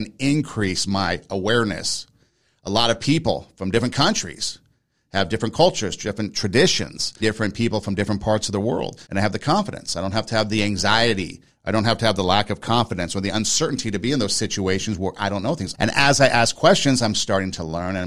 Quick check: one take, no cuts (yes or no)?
no